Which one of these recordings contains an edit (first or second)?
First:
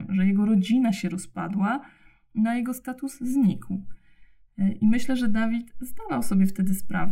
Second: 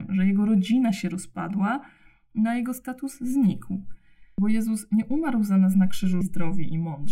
second